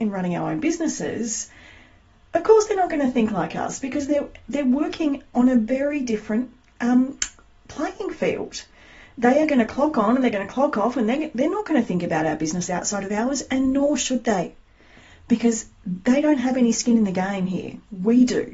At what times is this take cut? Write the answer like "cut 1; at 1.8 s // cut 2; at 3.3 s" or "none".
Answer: none

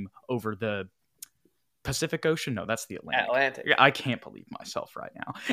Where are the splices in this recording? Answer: none

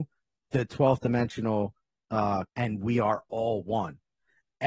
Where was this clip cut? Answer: cut 1; at 2.5 s

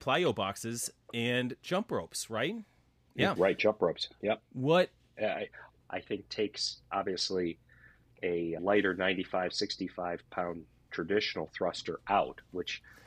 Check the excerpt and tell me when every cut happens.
cut 1; at 5.8 s

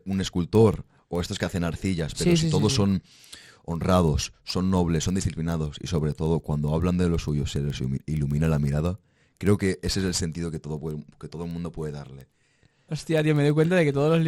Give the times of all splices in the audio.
cut 1; at 12.9 s

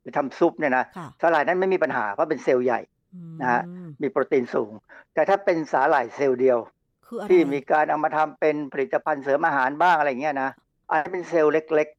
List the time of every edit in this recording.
none

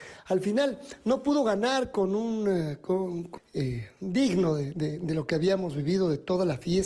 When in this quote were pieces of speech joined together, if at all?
cut 1; at 3.4 s

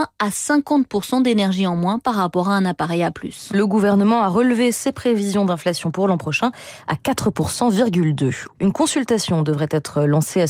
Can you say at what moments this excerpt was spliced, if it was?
cut 1; at 3.5 s // cut 2; at 8.6 s

